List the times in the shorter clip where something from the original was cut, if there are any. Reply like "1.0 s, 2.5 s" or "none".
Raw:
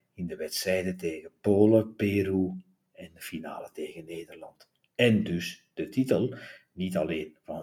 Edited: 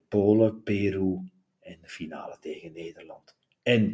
none